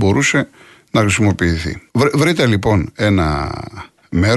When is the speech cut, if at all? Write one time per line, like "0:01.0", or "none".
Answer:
0:01.9